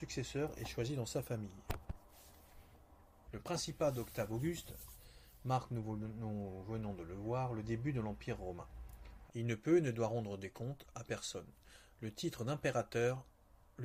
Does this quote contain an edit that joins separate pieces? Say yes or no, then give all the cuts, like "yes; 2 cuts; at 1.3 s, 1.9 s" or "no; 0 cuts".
yes; 2 cuts; at 3.3 s, 9.3 s